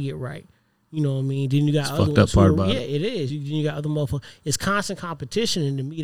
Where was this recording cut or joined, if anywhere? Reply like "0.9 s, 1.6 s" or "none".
none